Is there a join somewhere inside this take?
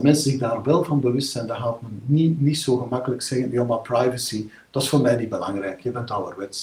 no; 0 cuts

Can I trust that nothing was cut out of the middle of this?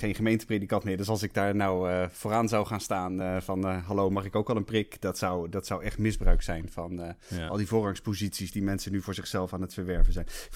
yes; 0 cuts

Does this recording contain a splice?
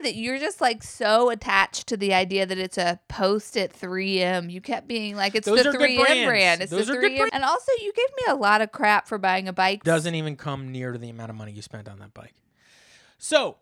yes; 2 cuts; at 7.3 s, 9.8 s

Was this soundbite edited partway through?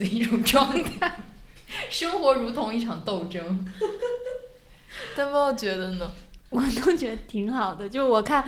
no; 0 cuts

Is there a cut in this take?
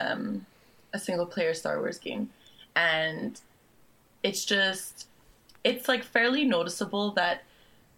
no; 0 cuts

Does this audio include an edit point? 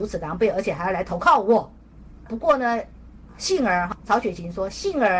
no; 0 cuts

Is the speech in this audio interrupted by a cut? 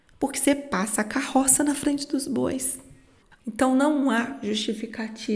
yes; 1 cut; at 3.4 s

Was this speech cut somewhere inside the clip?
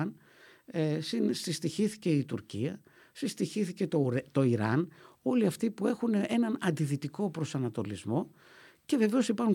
no; 0 cuts

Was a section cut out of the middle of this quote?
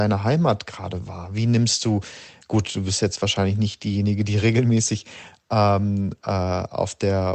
no; 0 cuts

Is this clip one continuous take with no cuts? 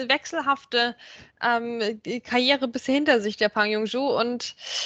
yes; 0 cuts

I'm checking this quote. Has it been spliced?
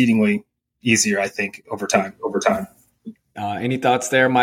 yes; 1 cut; at 3.3 s

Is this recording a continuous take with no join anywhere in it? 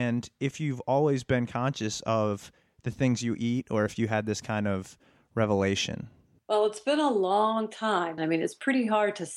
no; 1 cut; at 8.2 s

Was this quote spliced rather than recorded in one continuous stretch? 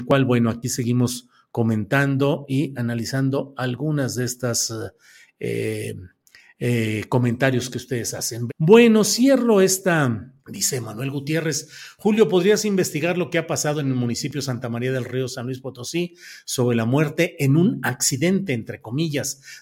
yes; 2 cuts; at 8.5 s, 10.4 s

